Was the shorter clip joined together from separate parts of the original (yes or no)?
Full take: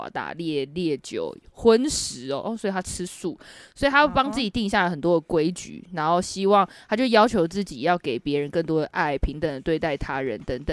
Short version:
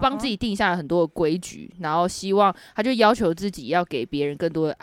no